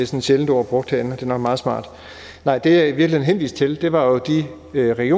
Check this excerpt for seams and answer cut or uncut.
uncut